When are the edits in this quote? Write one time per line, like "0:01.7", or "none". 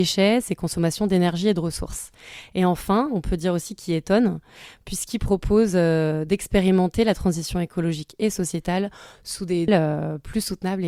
0:09.7